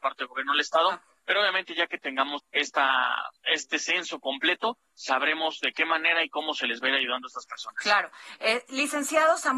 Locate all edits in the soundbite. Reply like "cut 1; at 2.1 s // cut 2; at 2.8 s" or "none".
cut 1; at 2.4 s